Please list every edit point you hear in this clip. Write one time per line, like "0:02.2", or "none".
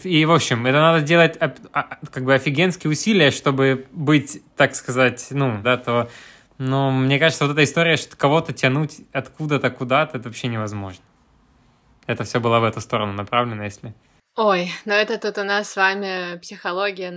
0:05.6